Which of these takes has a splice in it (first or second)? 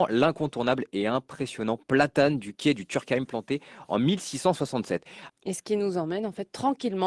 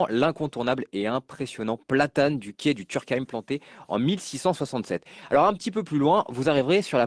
first